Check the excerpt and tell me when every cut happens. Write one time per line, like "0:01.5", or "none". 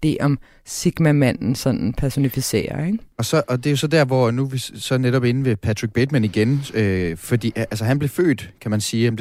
none